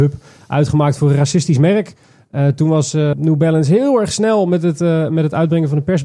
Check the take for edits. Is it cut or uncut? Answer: cut